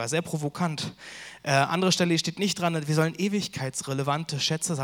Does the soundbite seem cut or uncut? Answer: uncut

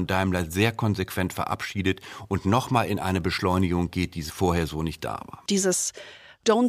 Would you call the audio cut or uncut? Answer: cut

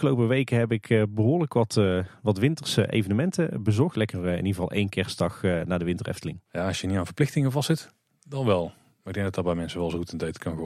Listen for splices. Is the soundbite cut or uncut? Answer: cut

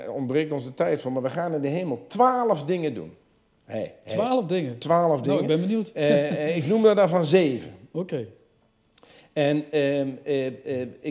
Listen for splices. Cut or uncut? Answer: uncut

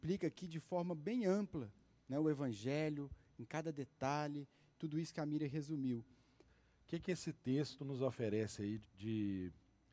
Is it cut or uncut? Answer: cut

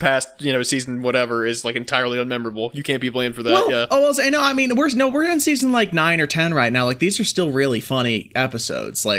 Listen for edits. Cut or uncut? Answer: uncut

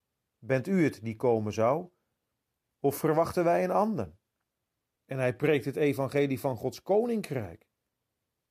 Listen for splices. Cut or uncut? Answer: cut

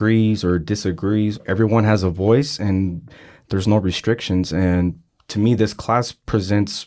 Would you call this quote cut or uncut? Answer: uncut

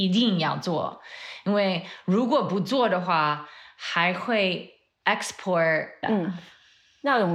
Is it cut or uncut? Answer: cut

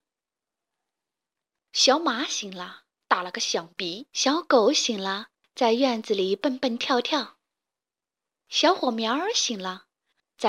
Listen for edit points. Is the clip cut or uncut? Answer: cut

